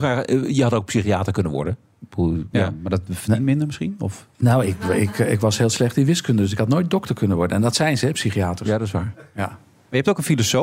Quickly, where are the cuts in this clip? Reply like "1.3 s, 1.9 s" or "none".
2.5 s